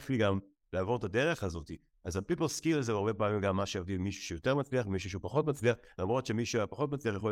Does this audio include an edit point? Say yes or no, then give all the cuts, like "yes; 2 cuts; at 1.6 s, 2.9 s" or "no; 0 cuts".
no; 0 cuts